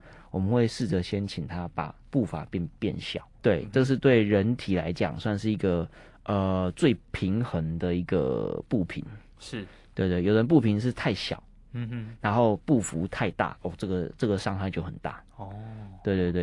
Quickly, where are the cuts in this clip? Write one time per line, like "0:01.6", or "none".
0:03.4

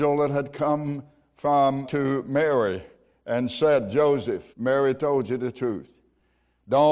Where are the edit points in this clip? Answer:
0:01.8
0:04.5

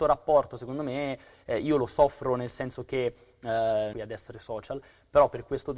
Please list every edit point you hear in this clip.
0:03.9

